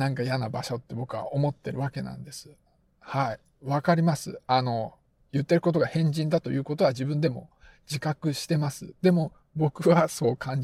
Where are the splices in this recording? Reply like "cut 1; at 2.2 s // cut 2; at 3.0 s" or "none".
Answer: none